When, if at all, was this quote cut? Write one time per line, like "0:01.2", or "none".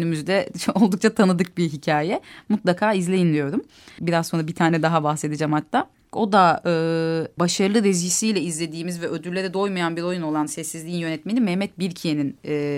0:04.0
0:06.1
0:07.4